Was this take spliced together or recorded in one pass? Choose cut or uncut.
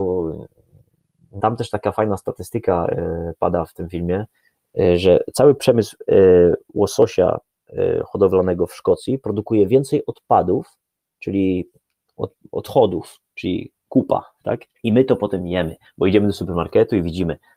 cut